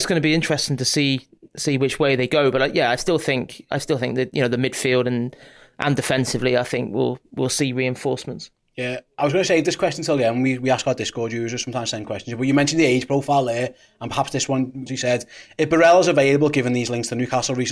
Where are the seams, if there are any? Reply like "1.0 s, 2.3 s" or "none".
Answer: 14.9 s